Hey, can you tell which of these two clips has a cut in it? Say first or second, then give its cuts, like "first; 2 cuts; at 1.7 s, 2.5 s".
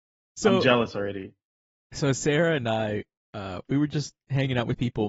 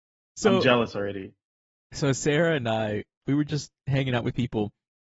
second; 1 cut; at 3.2 s